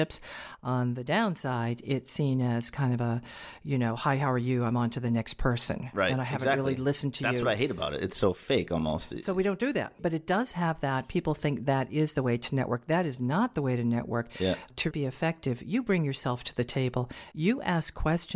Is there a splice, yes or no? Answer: yes